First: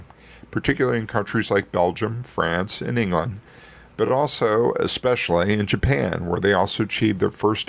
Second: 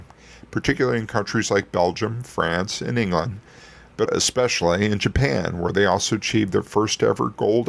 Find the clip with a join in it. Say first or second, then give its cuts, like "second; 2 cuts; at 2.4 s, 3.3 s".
second; 1 cut; at 4.1 s